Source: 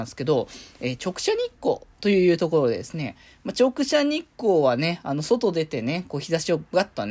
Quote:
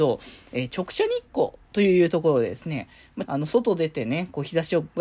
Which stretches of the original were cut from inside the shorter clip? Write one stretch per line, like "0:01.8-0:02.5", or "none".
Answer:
0:03.5-0:05.0